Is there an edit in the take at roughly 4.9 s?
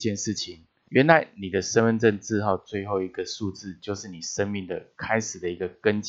no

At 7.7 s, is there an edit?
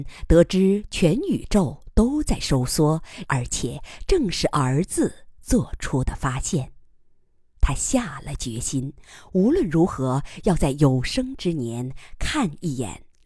no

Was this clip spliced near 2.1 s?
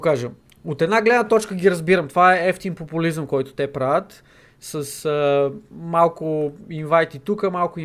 no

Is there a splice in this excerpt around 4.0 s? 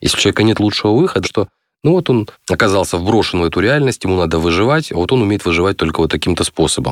no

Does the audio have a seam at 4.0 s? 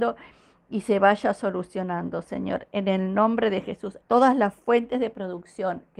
yes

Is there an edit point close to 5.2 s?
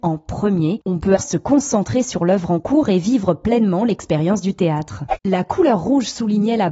no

